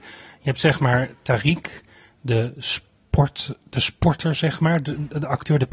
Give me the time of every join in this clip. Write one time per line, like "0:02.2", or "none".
none